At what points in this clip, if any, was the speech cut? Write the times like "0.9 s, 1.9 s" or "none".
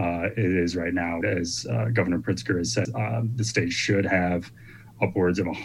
1.2 s, 2.9 s